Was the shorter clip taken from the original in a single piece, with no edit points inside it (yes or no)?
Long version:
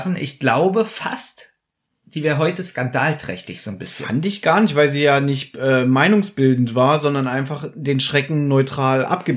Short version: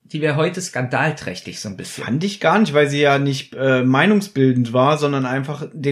yes